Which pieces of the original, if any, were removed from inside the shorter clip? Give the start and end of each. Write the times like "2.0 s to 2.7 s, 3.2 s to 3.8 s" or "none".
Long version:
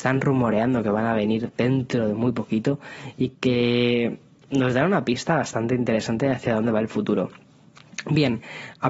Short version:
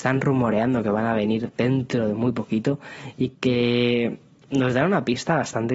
none

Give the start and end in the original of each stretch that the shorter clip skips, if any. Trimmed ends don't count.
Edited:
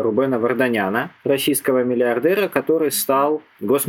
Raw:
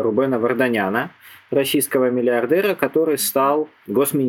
1.2 s to 1.5 s

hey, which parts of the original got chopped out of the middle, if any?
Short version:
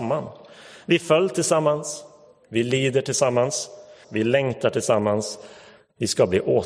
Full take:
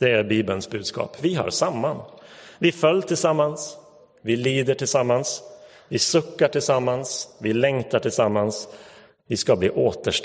5.8 s to 7.3 s

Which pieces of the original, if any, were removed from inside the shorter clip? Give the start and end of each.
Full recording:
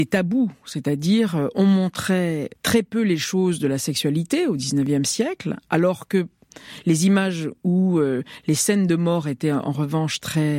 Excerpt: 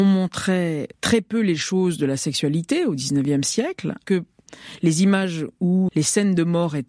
5.7 s to 6.1 s, 7.9 s to 8.4 s

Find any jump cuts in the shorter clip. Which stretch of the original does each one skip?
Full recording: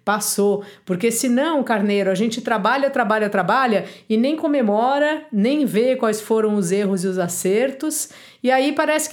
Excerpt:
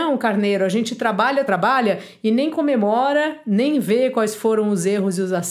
2.9 s to 3.3 s

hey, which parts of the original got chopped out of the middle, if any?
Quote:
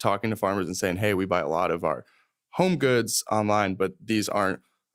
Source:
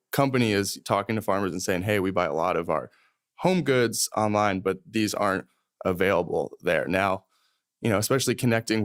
none

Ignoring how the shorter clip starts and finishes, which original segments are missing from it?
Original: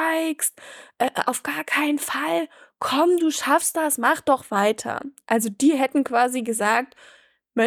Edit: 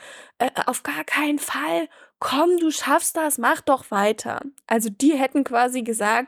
none

